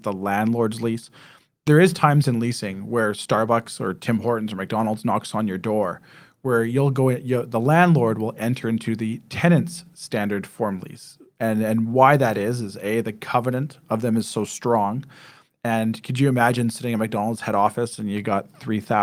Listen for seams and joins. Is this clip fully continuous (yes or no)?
yes